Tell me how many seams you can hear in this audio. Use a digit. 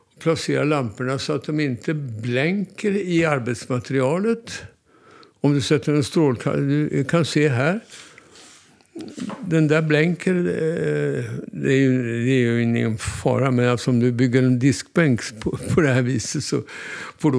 0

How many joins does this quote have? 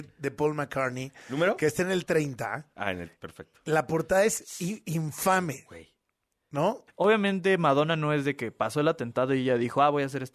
1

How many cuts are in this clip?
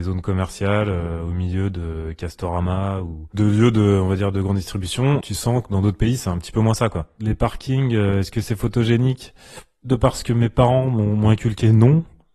0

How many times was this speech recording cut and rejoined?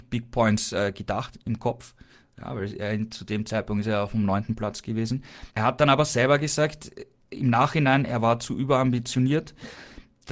1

